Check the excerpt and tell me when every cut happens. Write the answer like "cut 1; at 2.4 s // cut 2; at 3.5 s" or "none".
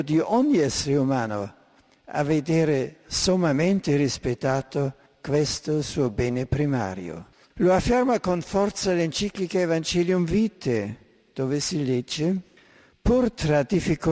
cut 1; at 7.5 s